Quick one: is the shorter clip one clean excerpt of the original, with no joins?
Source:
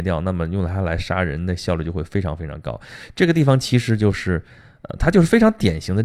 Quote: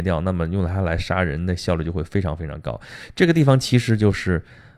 yes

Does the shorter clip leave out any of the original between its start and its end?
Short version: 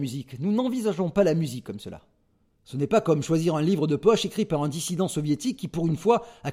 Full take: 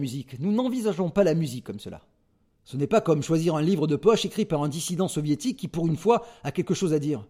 no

